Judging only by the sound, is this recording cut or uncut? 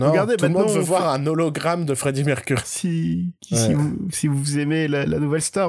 cut